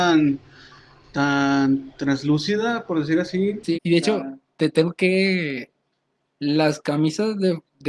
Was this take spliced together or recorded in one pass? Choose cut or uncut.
cut